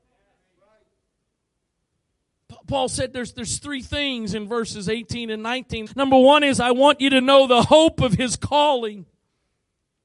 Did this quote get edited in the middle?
yes; 1 cut; at 5.9 s

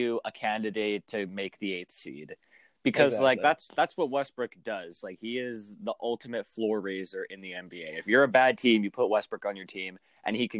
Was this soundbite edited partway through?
no; 0 cuts

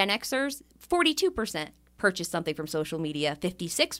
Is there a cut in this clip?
no; 0 cuts

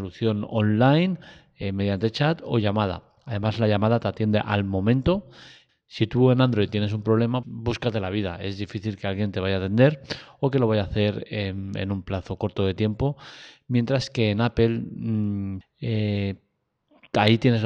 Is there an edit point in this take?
yes; 3 cuts; at 5.7 s, 7.4 s, 15.6 s

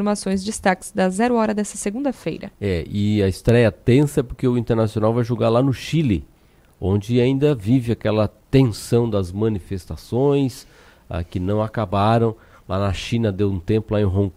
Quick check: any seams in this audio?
no; 0 cuts

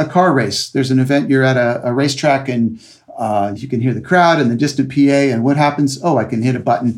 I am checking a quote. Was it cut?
yes; 1 cut; at 3.6 s

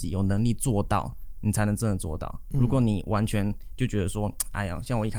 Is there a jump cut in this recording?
no; 0 cuts

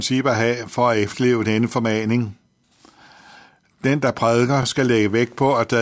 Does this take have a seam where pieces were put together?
no; 0 cuts

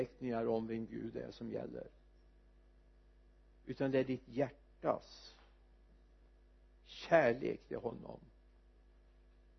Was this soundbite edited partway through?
no; 0 cuts

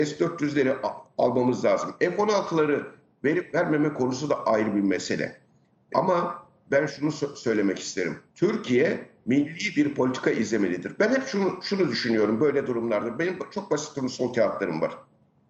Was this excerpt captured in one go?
no; 2 cuts; at 5.9 s, 8.3 s

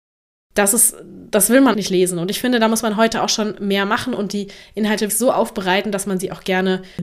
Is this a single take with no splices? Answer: no; 2 cuts; at 1.7 s, 5.1 s

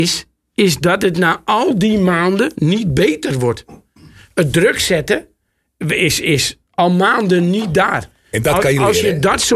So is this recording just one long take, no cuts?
yes; 0 cuts

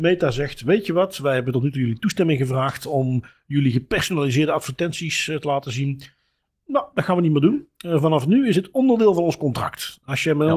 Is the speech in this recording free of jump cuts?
yes; 0 cuts

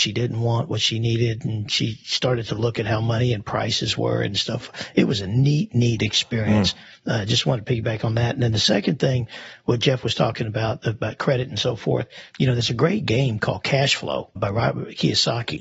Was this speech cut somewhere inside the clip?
no; 0 cuts

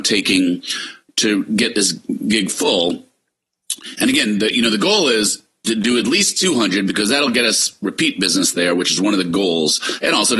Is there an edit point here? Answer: no; 0 cuts

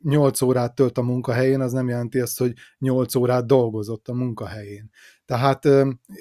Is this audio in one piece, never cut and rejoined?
yes; 0 cuts

